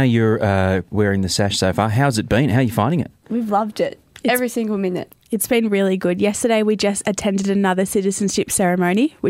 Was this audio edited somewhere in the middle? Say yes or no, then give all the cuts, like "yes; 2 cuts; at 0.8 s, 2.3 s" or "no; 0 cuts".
yes; 1 cut; at 0.9 s